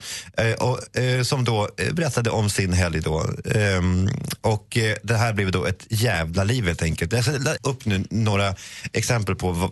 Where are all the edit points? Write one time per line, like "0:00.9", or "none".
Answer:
0:07.6